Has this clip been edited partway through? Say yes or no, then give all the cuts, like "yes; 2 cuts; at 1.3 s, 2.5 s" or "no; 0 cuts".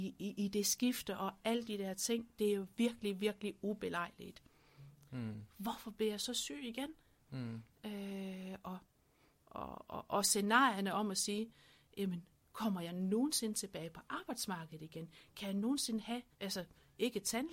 yes; 3 cuts; at 5.1 s, 7.2 s, 16.3 s